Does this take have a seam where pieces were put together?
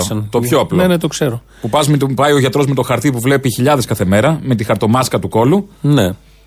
no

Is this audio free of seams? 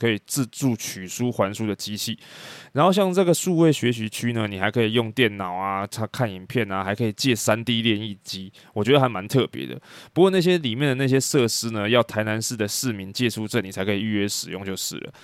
yes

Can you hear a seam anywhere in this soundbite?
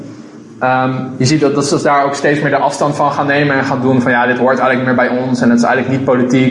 no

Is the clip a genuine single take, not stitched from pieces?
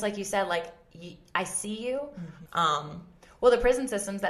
no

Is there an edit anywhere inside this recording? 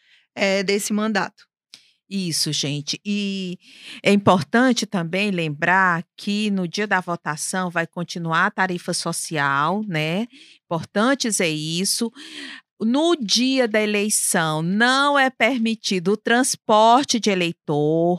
no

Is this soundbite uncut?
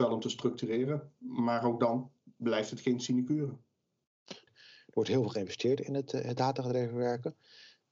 no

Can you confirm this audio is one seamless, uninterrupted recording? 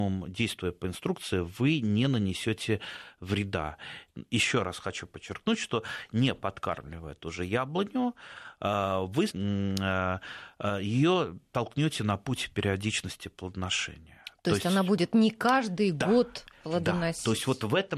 no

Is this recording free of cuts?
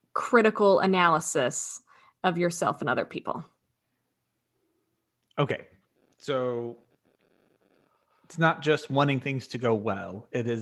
yes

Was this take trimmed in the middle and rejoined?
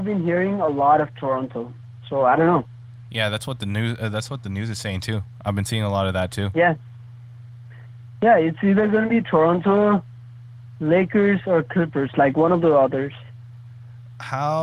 no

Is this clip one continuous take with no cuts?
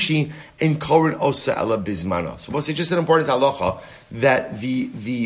yes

